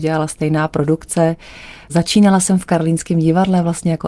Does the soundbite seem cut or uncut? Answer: uncut